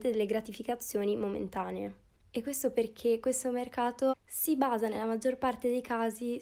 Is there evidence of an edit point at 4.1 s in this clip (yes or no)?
yes